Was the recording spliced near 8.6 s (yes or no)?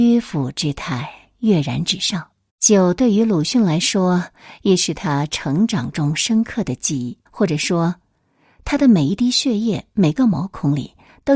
no